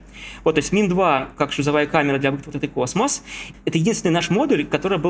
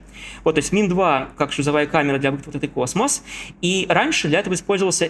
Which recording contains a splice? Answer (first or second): first